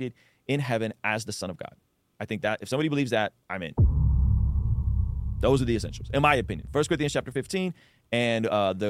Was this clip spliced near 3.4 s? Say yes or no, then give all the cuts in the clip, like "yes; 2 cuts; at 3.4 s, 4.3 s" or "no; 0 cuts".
yes; 1 cut; at 3.4 s